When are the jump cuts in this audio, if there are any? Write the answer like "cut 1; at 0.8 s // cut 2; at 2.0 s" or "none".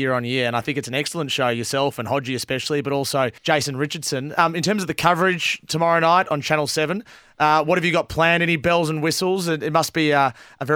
cut 1; at 3.4 s